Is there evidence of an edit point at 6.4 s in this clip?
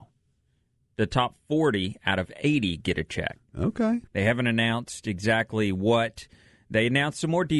no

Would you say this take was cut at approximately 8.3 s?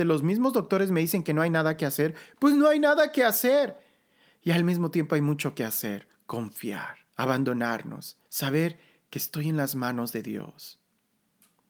yes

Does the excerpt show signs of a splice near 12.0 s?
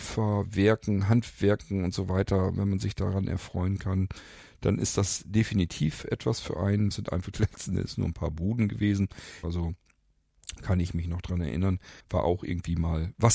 yes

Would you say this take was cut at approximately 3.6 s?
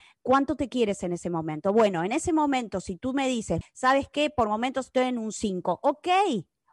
yes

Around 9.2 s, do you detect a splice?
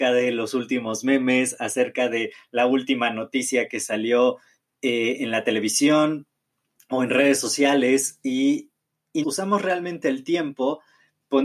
yes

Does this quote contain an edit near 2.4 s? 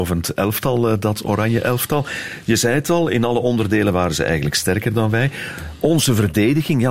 no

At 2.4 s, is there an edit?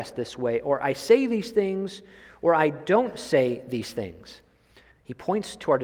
no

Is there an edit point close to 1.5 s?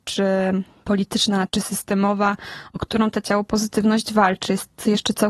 yes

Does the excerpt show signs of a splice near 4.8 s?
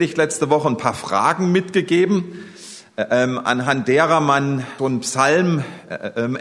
yes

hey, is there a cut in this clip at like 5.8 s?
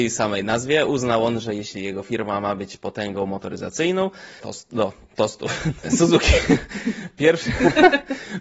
yes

